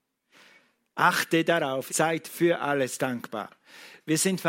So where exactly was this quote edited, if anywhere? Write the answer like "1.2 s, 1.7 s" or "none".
1.9 s